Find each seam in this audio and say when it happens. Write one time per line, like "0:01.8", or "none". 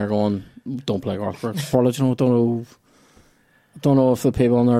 0:01.7

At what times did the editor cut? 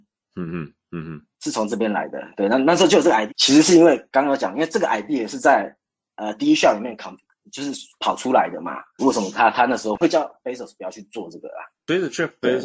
0:03.3
0:09.0

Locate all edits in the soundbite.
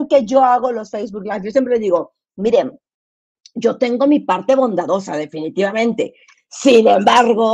none

